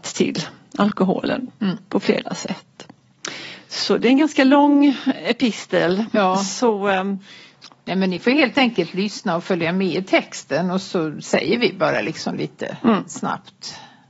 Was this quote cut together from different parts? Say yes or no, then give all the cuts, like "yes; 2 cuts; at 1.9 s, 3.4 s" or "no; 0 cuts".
no; 0 cuts